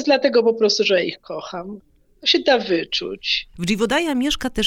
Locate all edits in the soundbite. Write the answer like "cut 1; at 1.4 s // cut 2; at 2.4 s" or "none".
cut 1; at 3.5 s